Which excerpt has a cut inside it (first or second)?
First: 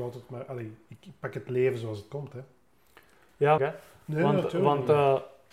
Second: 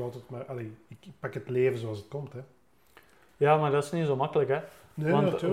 first